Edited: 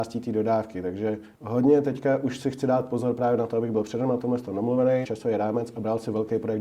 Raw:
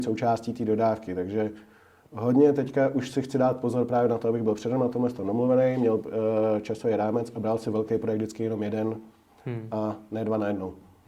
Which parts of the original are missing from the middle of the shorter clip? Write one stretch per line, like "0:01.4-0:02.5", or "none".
0:01.7-0:02.0
0:05.8-0:06.6